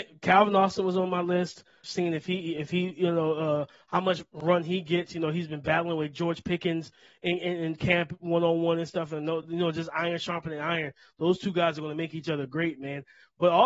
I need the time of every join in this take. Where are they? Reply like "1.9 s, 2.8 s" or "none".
1.8 s